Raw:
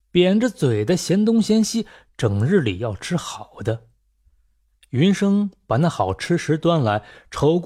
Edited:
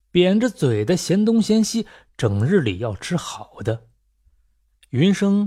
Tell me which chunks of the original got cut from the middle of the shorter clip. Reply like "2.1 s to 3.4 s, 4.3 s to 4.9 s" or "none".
none